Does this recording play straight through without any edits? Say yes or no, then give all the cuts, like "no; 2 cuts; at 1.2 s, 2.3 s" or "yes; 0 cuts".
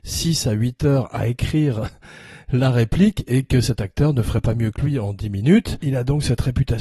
yes; 0 cuts